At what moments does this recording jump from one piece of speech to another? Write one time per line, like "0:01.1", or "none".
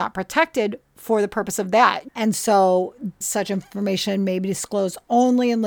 0:02.1
0:03.2